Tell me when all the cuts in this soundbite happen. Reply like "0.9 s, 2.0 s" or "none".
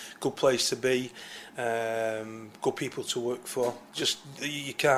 3.9 s